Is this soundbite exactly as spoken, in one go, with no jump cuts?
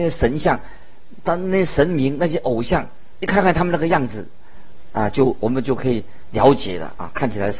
yes; 0 cuts

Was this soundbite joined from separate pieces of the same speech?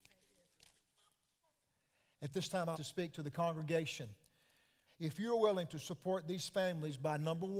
yes; 2 cuts; at 2.7 s, 4.9 s

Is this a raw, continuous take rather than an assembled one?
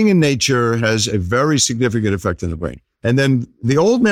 no; 1 cut; at 2.9 s

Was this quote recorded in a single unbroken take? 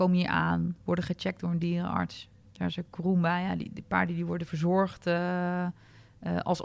yes; 0 cuts

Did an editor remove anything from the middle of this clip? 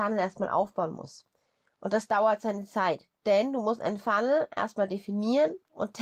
yes; 1 cut; at 3.1 s

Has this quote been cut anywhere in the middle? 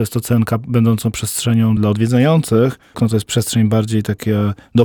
yes; 2 cuts; at 1.8 s, 2.9 s

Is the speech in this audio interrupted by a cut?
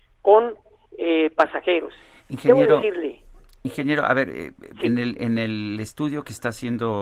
no; 0 cuts

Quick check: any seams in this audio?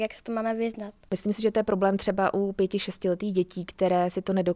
no; 0 cuts

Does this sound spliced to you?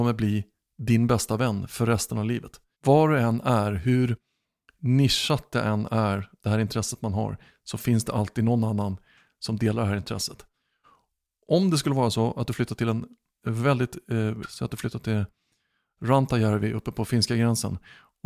yes; 2 cuts; at 2.7 s, 14.4 s

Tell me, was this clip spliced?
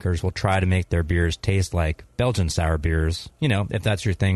yes; 1 cut; at 3.4 s

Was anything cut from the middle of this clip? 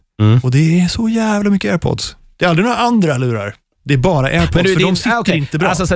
no; 0 cuts

